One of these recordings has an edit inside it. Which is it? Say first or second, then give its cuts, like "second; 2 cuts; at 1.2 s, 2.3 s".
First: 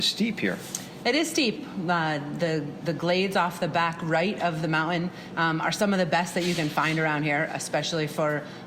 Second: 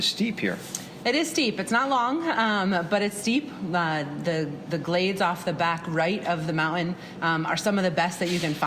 first; 1 cut; at 1.6 s